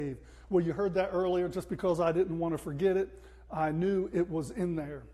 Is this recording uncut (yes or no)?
yes